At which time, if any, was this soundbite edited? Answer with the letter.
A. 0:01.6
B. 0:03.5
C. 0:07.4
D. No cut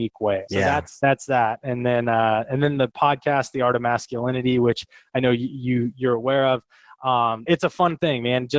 D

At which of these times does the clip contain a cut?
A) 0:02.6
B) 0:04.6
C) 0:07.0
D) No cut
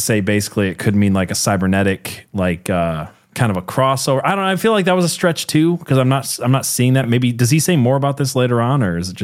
D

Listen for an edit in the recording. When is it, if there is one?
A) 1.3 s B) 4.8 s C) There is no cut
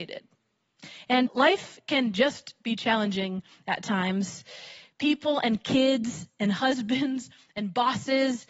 A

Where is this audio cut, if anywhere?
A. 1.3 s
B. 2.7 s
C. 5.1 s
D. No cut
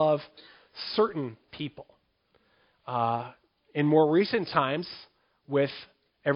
B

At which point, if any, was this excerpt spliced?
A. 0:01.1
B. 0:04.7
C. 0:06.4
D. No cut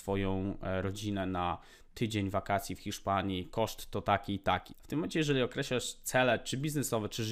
B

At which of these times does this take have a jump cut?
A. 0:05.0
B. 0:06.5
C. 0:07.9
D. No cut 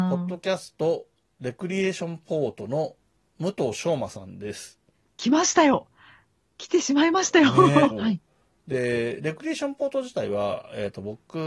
C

